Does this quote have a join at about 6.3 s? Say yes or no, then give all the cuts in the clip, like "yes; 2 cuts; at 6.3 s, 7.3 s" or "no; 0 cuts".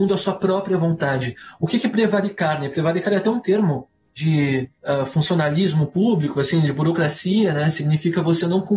no; 0 cuts